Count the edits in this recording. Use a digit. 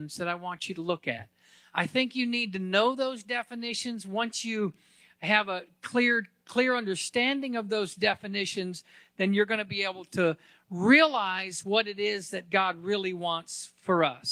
0